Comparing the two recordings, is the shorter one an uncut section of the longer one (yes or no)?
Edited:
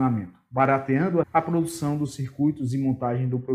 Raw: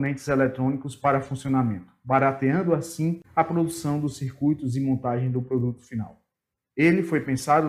no